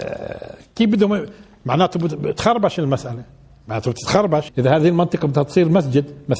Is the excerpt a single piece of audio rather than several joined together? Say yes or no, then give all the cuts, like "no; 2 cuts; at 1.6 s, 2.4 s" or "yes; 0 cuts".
no; 1 cut; at 4.5 s